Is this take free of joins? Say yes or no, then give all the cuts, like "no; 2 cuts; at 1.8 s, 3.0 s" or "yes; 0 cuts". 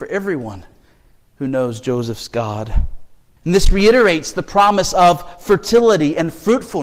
no; 1 cut; at 3.4 s